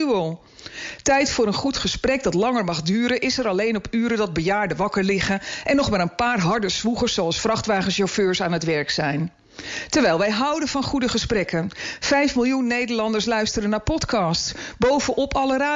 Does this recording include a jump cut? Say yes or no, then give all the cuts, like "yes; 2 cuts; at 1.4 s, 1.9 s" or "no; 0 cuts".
no; 0 cuts